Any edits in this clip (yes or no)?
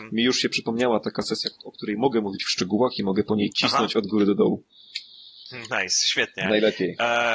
no